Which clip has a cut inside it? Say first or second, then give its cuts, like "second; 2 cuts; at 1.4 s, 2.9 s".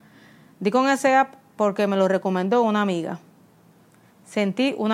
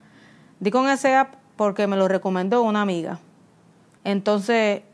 second; 1 cut; at 4.0 s